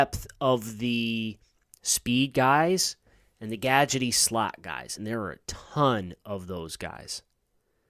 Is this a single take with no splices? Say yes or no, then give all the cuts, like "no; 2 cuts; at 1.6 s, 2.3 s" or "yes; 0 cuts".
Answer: yes; 0 cuts